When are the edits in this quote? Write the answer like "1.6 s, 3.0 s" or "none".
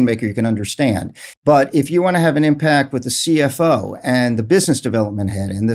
1.3 s